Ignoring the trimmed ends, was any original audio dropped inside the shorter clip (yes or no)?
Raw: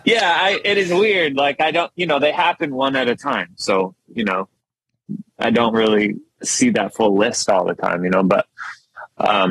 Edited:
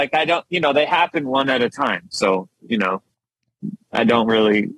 no